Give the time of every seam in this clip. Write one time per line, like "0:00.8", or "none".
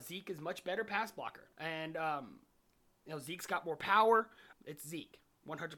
0:01.5
0:04.5